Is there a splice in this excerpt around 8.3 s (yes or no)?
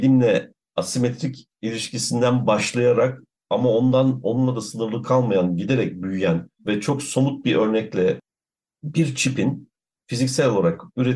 no